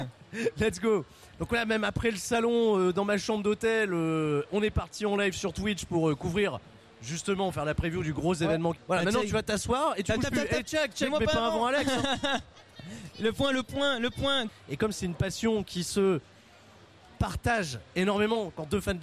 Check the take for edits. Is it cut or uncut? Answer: cut